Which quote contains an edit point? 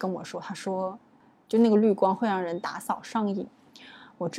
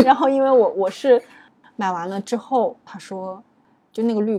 second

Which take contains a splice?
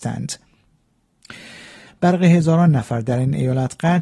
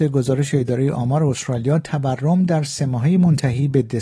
first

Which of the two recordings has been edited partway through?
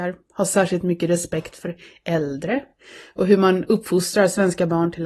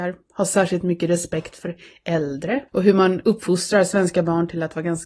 second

